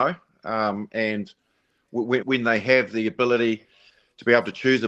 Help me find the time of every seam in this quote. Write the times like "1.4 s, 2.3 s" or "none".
2.2 s